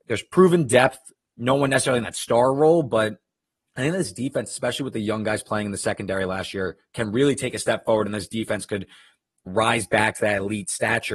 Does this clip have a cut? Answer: no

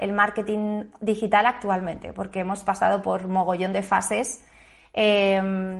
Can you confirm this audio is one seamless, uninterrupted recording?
yes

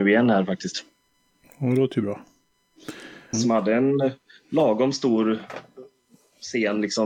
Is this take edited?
yes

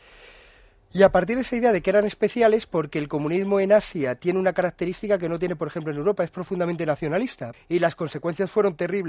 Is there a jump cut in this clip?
yes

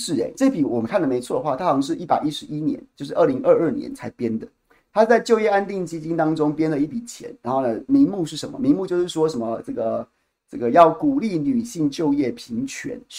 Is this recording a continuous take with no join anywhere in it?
yes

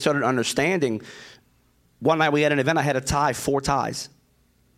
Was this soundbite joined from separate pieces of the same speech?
no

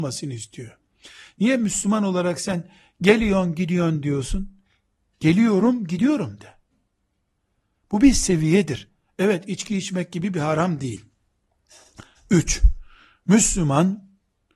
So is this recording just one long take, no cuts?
yes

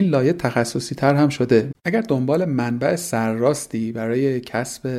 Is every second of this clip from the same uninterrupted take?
no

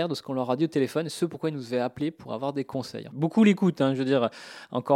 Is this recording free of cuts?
no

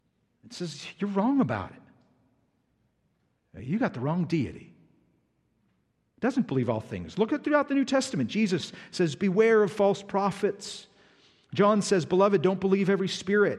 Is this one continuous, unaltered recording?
yes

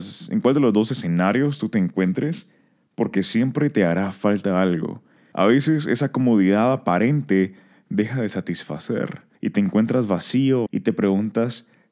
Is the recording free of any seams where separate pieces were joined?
no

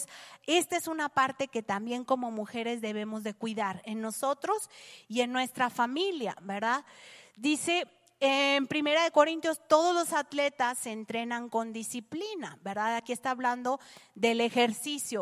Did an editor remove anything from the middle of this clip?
no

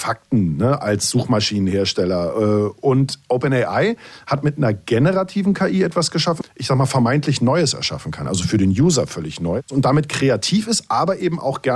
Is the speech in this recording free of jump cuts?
no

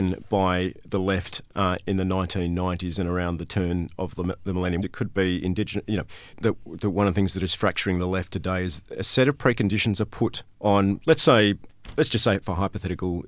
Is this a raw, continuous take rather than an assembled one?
no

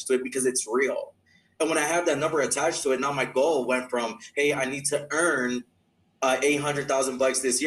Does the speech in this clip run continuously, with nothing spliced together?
yes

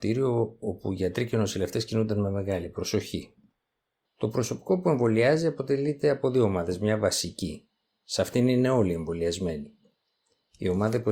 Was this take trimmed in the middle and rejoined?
yes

